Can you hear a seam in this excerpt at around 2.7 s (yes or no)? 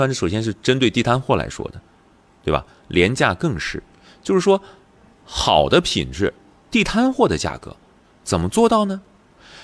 no